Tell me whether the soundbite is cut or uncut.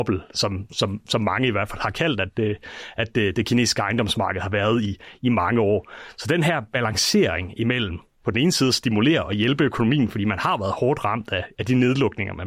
uncut